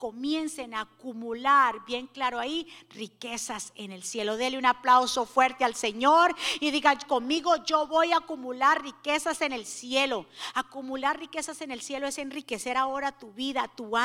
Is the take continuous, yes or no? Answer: yes